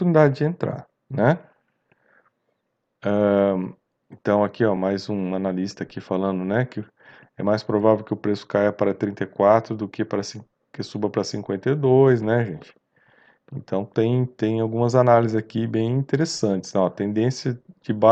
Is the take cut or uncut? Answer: uncut